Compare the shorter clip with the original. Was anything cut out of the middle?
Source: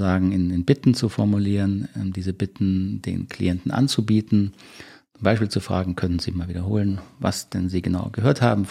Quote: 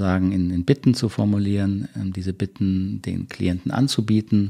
no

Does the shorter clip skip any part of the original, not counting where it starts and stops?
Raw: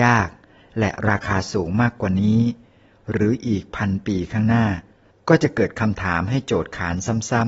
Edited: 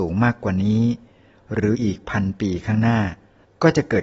yes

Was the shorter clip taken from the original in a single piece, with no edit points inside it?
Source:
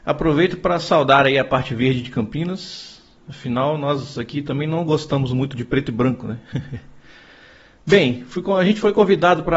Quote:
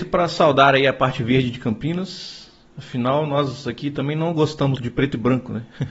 no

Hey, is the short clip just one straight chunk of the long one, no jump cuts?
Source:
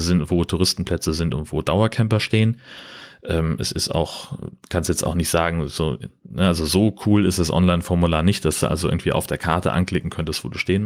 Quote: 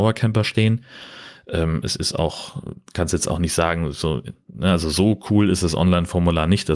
yes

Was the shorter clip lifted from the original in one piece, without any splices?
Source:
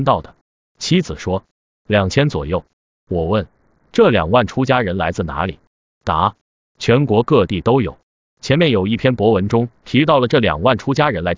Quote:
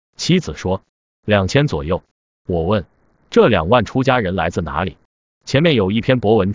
no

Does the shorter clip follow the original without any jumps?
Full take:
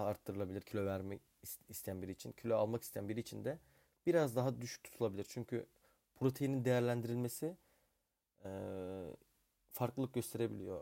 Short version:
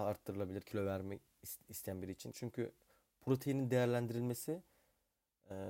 no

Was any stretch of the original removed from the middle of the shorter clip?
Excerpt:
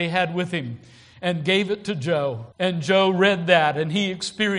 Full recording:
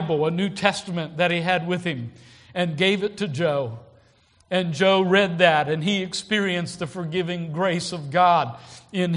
yes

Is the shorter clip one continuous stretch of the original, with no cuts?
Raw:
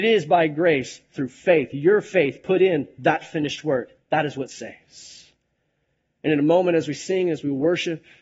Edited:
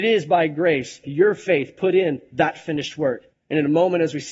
no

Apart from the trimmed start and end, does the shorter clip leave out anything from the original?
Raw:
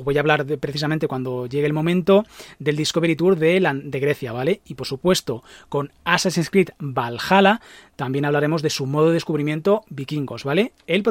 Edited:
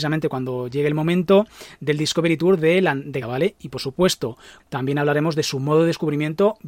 yes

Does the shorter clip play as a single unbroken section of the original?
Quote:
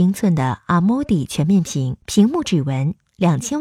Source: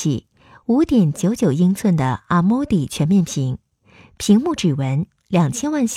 no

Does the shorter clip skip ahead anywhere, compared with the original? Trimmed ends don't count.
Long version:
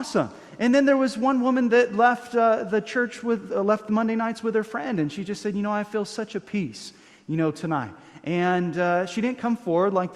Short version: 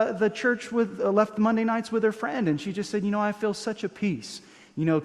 no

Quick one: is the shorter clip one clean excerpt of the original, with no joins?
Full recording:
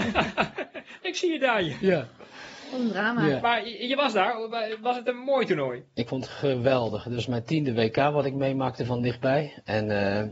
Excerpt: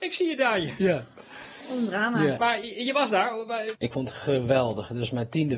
no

